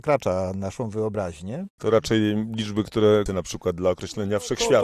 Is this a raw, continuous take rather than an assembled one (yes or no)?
no